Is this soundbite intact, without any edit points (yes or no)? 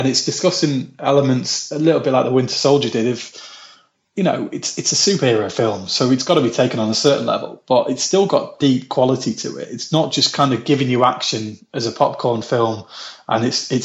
yes